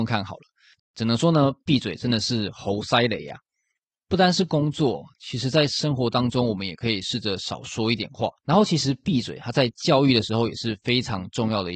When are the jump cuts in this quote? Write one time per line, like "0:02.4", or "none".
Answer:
0:08.4